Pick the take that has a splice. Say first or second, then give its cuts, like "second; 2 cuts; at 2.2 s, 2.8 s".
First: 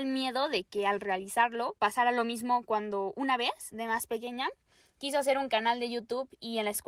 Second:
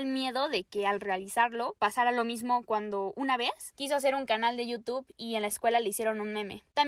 second; 1 cut; at 3.7 s